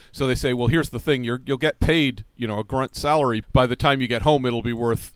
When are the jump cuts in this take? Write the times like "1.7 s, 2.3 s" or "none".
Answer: 3.4 s